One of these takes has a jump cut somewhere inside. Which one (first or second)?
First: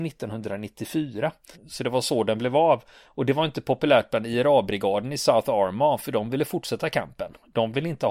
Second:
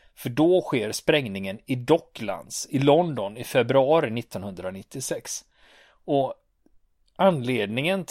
first